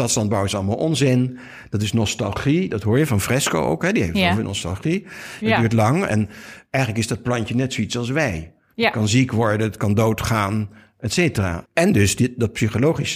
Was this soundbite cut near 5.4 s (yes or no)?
yes